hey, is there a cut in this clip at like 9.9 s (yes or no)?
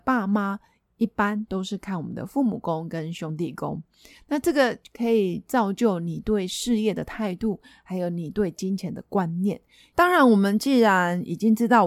yes